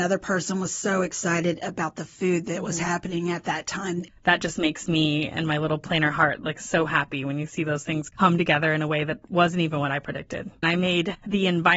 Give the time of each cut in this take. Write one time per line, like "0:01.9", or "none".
0:04.1
0:10.6